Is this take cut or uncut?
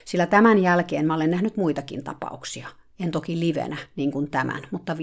uncut